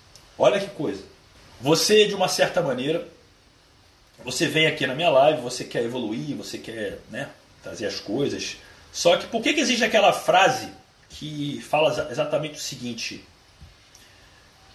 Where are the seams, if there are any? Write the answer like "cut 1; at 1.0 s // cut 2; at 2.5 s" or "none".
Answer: none